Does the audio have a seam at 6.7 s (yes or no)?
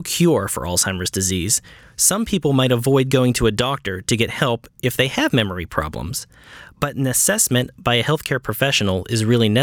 no